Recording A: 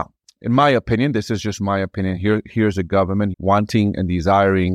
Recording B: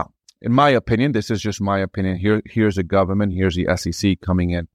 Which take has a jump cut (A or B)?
A